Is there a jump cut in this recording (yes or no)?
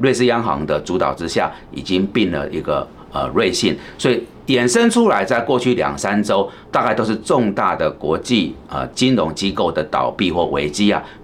no